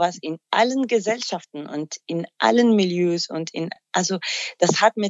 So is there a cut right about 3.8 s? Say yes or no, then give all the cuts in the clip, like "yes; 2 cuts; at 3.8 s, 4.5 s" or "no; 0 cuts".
no; 0 cuts